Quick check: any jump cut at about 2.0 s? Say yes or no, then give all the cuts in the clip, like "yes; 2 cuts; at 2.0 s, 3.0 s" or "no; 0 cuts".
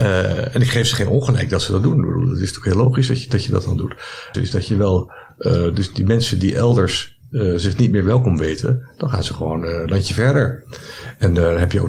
no; 1 cut; at 4.3 s